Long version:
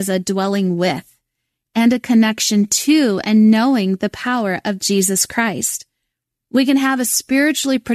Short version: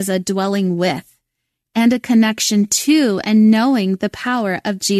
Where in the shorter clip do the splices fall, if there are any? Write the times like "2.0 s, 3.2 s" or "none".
none